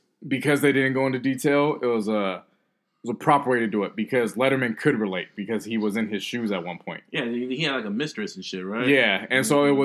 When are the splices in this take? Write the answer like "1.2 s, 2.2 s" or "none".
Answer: none